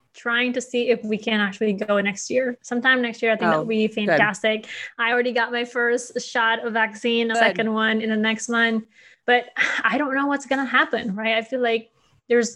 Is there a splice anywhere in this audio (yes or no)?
yes